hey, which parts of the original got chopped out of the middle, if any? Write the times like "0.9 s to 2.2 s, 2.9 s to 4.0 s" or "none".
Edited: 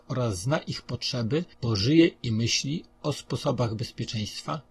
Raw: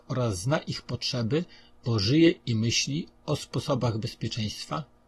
1.5 s to 1.8 s